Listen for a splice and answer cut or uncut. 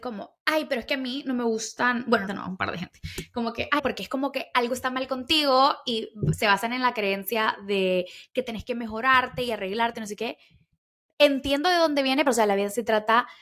cut